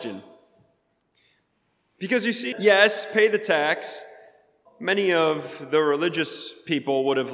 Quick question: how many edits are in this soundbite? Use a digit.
2